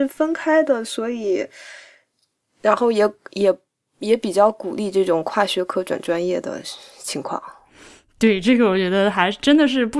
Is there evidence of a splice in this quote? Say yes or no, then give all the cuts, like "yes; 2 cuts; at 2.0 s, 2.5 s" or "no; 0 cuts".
no; 0 cuts